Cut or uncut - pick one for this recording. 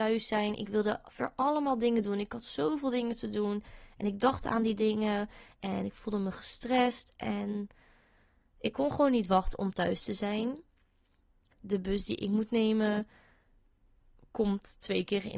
cut